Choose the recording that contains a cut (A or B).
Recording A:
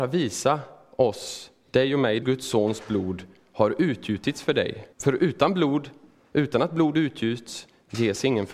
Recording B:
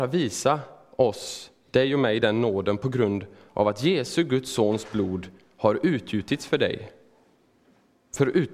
A